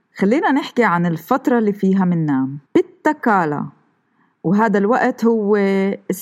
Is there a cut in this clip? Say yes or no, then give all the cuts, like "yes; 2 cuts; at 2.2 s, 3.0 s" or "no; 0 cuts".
yes; 1 cut; at 2.6 s